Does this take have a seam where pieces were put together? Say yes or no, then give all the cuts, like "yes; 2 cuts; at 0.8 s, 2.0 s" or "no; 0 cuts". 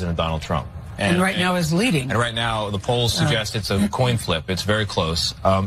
yes; 1 cut; at 1.0 s